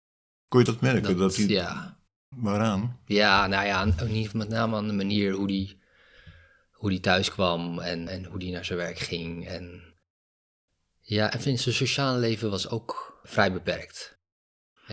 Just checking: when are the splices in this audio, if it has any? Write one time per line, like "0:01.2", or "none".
0:08.1